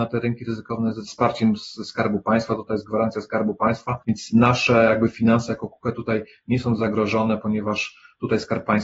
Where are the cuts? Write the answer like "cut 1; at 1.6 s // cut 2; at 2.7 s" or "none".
cut 1; at 4.0 s